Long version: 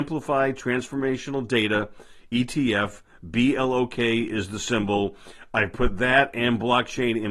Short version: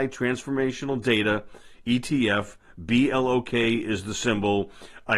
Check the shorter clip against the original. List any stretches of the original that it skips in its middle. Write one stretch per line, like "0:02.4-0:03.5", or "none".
none